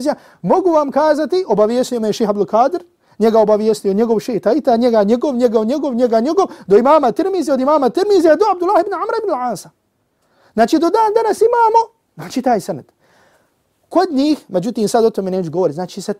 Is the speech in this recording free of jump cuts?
yes; 0 cuts

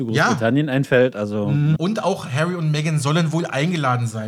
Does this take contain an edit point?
yes; 1 cut; at 1.8 s

